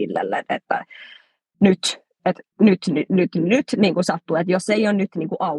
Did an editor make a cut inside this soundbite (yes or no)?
no